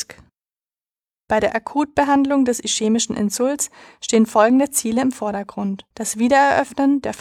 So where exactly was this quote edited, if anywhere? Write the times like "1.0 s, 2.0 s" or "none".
5.9 s